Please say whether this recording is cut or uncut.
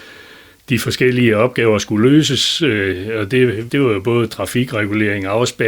cut